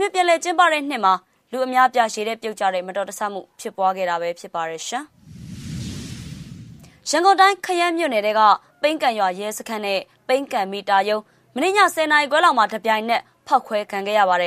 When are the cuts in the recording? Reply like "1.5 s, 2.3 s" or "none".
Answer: none